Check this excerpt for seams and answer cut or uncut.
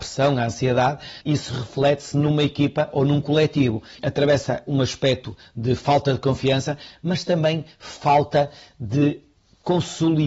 cut